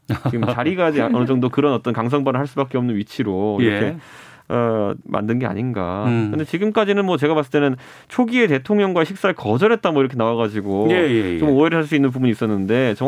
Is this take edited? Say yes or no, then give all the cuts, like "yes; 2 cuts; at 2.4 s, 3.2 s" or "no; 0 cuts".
no; 0 cuts